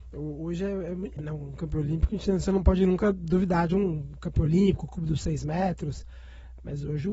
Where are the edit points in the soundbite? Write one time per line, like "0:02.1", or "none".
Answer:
0:01.2